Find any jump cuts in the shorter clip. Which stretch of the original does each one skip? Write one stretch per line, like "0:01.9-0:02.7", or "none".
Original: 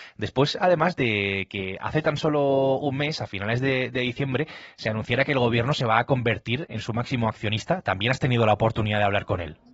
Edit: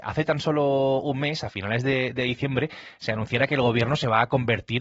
none